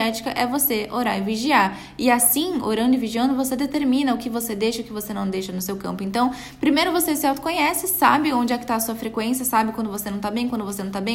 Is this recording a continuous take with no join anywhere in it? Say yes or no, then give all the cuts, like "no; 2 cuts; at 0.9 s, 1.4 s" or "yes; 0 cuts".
yes; 0 cuts